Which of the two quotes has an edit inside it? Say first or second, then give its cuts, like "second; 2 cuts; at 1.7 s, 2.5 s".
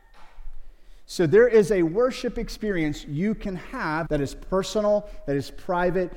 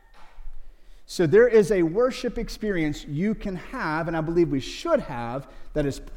first; 1 cut; at 4.1 s